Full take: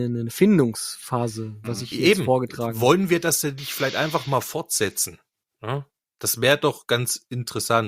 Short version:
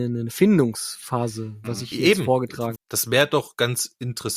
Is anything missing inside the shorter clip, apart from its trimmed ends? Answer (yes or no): yes